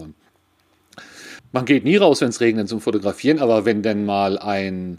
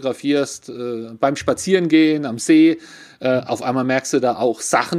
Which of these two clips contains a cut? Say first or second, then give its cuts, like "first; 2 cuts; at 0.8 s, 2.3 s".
first; 1 cut; at 1.4 s